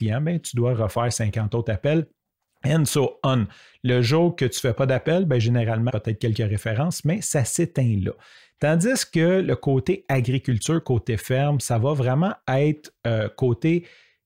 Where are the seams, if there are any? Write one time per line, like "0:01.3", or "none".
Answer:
0:05.9